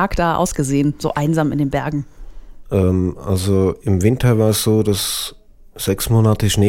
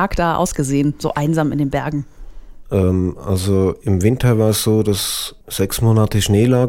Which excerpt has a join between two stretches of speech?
second; 1 cut; at 5.4 s

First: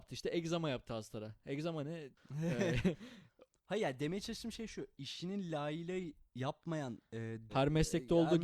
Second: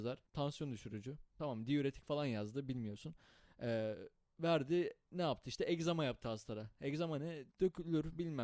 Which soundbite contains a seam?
first; 2 cuts; at 2.1 s, 7.5 s

